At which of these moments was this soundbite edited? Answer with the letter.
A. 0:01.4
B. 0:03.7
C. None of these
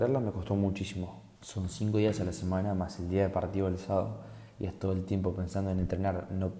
A